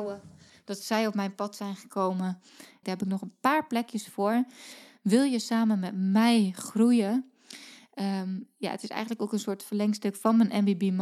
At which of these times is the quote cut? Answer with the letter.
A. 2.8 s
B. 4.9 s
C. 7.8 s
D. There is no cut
A